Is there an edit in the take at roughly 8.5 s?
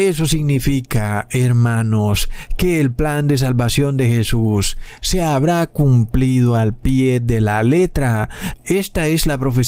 yes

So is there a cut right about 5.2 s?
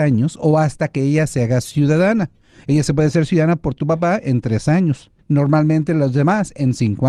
yes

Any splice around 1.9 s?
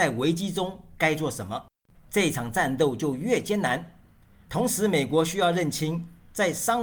yes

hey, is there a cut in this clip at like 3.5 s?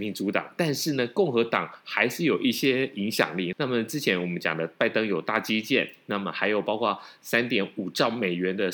yes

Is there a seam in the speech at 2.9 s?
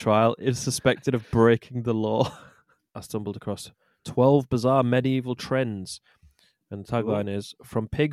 yes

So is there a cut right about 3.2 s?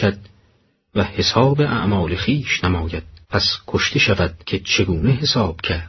yes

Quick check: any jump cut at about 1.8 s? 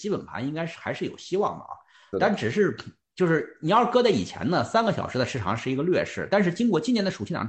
no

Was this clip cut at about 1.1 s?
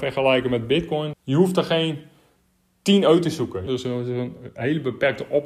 yes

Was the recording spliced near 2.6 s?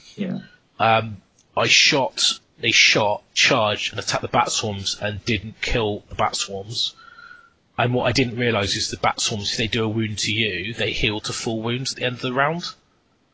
yes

